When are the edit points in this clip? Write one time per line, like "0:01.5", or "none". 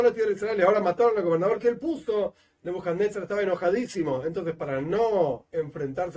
none

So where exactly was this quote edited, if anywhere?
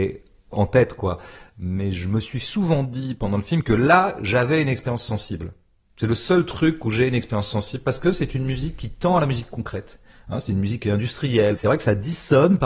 none

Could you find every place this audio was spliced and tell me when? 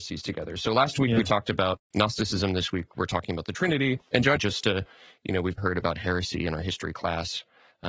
0:04.4
0:05.6

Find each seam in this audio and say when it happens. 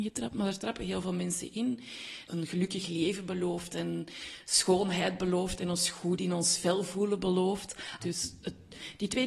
0:02.3
0:08.0

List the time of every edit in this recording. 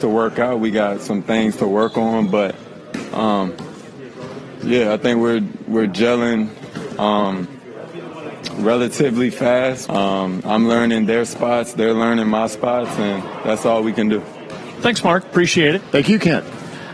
0:09.9
0:14.8

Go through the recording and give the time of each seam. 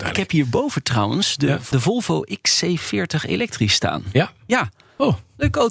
none

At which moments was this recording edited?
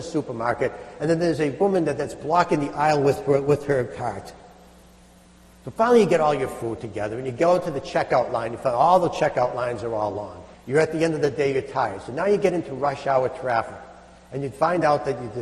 0:10.5

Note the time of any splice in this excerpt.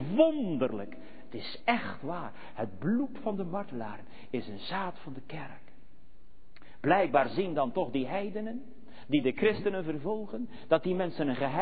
none

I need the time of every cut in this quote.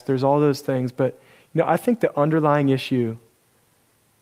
none

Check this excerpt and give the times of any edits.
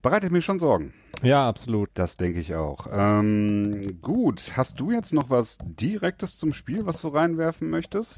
0:01.9

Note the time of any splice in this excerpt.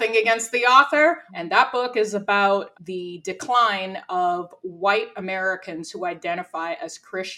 0:01.3
0:02.7

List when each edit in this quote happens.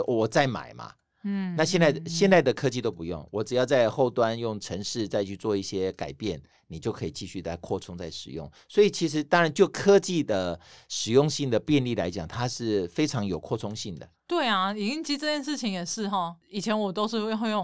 0:14.1

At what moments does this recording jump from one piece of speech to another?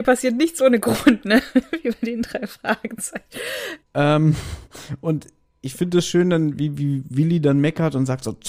0:03.8

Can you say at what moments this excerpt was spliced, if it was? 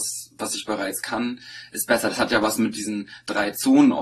none

